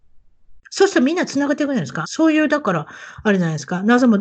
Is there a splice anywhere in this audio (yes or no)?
yes